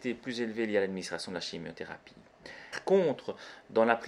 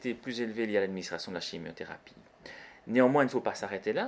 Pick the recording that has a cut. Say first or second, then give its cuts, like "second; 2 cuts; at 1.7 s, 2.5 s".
first; 1 cut; at 2.7 s